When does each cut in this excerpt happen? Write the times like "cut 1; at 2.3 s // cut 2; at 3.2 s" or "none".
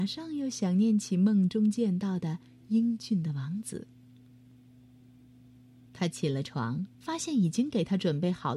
cut 1; at 5.9 s // cut 2; at 6.9 s